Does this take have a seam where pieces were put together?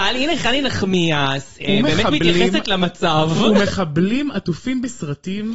no; 0 cuts

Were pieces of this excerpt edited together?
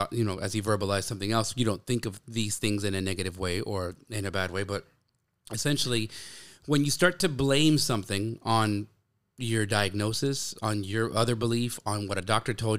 no; 0 cuts

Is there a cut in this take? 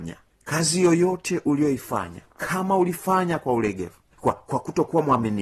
yes; 1 cut; at 4.1 s

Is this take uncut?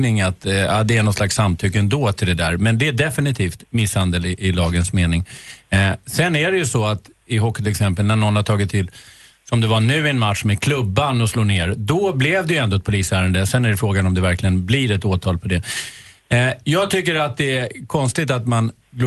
yes; 0 cuts

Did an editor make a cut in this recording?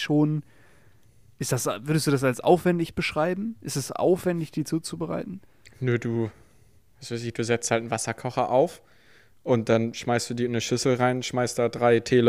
no; 0 cuts

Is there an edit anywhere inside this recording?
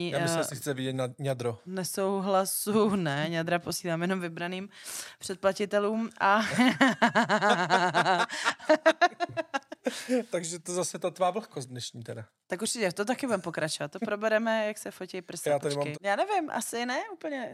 yes; 2 cuts; at 8.6 s, 15.9 s

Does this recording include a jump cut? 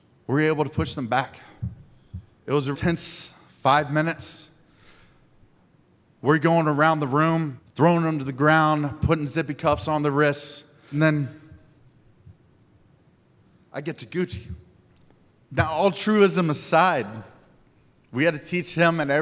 yes; 1 cut; at 2.7 s

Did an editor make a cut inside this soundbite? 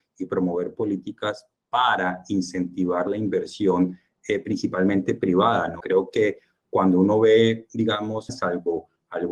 yes; 2 cuts; at 5.8 s, 8.3 s

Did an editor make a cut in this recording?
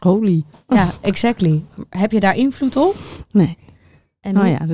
no; 0 cuts

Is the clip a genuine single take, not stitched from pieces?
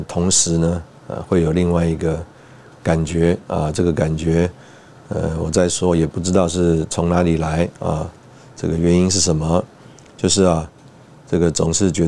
yes; 0 cuts

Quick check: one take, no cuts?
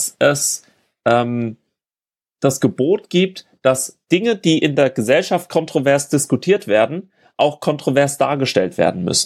yes; 0 cuts

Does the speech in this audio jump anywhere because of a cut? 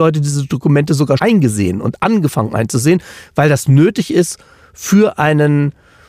yes; 1 cut; at 1.2 s

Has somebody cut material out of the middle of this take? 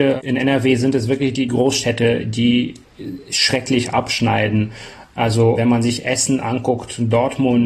no; 0 cuts

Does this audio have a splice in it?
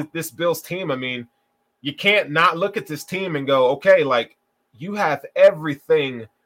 no; 0 cuts

